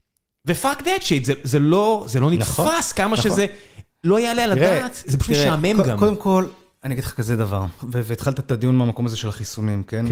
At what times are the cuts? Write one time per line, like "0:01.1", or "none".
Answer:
0:05.0
0:07.8